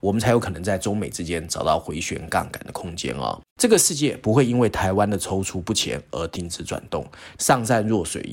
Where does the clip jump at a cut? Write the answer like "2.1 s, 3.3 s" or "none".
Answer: 3.5 s, 7.4 s